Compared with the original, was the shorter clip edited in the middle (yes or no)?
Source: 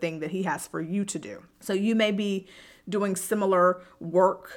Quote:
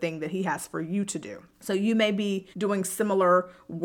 yes